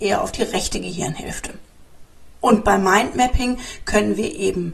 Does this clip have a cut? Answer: no; 0 cuts

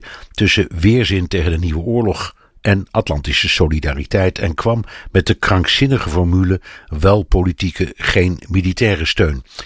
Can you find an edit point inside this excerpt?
no; 0 cuts

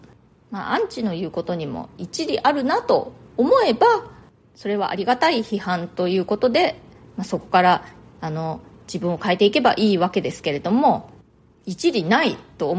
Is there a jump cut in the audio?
no; 0 cuts

